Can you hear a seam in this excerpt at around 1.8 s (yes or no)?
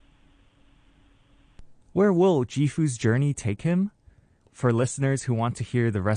yes